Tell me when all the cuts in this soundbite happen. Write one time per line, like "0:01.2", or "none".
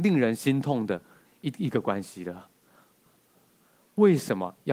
0:03.1